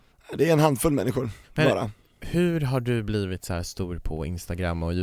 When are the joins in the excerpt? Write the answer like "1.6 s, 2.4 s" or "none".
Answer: 1.4 s